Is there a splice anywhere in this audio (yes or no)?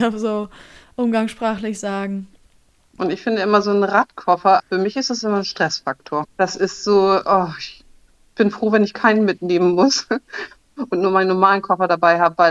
yes